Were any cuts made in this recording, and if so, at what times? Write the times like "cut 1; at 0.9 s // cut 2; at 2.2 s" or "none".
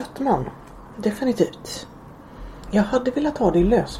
cut 1; at 0.9 s // cut 2; at 2.6 s